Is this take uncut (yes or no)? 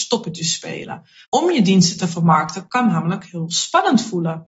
no